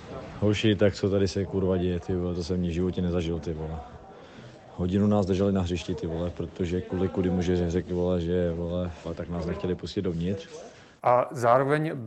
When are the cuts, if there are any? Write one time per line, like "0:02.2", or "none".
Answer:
0:09.0
0:11.0